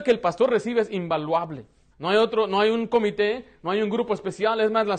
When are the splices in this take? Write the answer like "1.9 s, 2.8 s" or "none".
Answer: 1.9 s